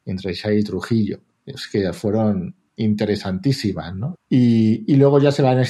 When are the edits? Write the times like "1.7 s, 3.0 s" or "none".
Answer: 4.2 s